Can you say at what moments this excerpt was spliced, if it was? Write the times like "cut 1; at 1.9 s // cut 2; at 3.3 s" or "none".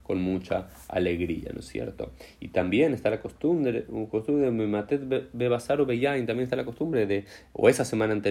none